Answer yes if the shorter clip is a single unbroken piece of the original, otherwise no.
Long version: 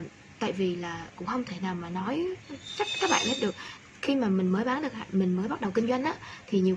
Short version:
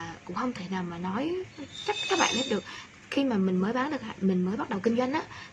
yes